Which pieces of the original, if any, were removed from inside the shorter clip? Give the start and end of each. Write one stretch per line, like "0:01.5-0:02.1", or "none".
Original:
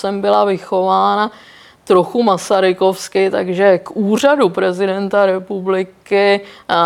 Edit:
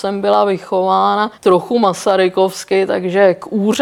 0:01.3-0:01.8